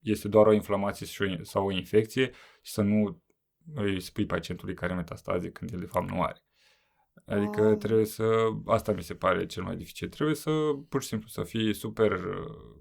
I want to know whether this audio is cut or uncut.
uncut